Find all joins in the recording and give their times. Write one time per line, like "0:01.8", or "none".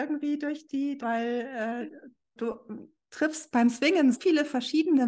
0:01.0
0:02.4
0:04.1

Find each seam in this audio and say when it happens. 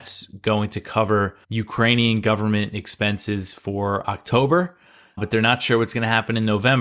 0:01.4
0:05.2

